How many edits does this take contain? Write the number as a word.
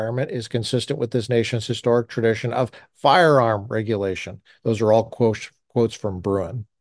zero